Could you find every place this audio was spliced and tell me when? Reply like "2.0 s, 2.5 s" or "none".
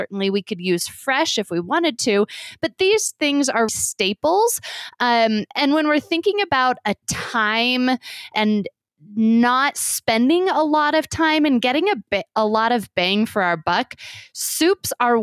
3.7 s, 8.3 s

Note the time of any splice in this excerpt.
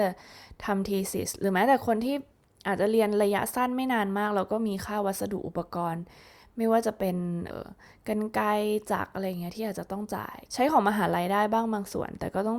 7.5 s, 10.5 s

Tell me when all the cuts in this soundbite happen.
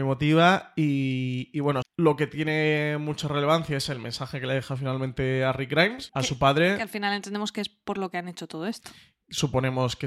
1.8 s, 6.1 s

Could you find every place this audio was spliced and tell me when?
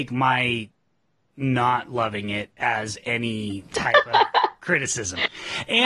2.6 s

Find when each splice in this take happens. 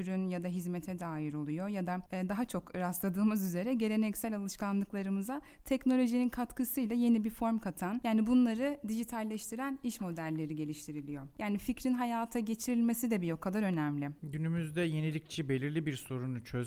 11.3 s, 14.2 s

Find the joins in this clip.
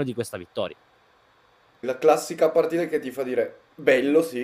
1.8 s

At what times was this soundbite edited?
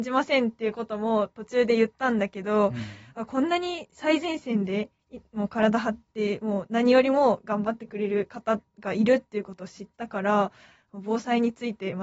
none

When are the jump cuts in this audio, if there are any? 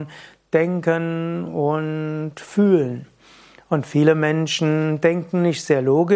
none

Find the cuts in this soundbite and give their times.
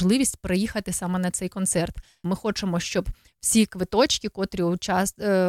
2.2 s

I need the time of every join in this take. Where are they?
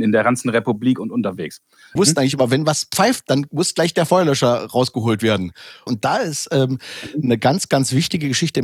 2.0 s, 5.9 s

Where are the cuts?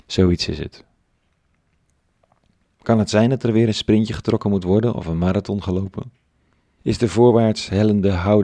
6.8 s

